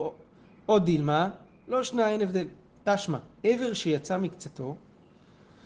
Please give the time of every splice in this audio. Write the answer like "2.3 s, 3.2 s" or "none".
3.3 s